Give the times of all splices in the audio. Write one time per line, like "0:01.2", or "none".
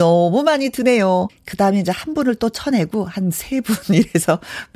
0:01.3

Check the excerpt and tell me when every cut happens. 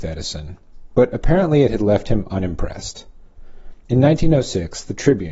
0:00.9

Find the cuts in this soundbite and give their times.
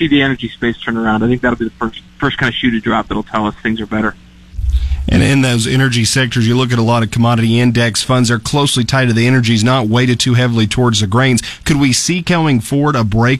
none

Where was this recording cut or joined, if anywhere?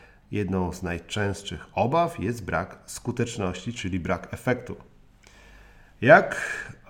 none

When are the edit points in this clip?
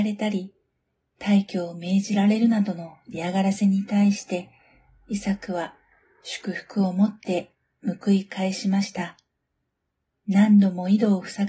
0:10.1

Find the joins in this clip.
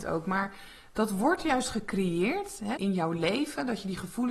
0:02.8

